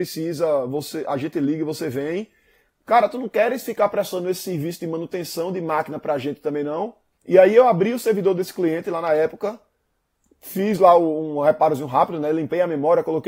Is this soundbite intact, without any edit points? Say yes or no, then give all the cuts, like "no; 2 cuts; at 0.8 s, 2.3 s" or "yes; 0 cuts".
no; 1 cut; at 7.1 s